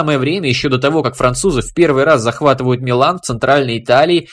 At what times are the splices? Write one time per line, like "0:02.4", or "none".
none